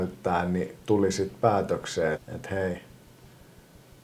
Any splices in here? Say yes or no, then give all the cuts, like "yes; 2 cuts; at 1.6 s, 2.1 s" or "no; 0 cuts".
yes; 1 cut; at 2.1 s